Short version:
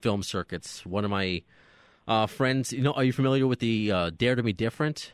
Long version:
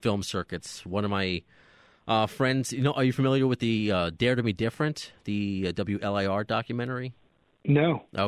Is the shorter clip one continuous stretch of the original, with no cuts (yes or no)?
yes